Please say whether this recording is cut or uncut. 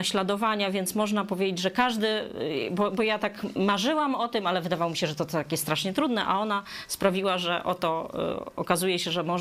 uncut